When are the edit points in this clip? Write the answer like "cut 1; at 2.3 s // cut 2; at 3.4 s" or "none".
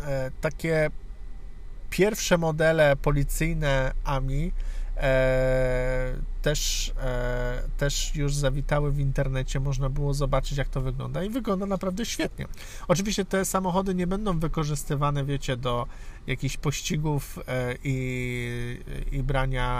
none